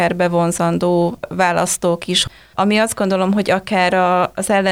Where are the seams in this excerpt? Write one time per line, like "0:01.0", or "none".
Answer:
0:02.5